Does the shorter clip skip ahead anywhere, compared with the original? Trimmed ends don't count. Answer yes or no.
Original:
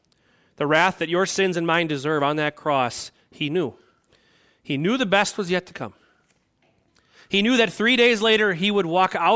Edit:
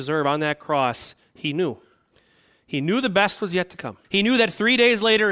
yes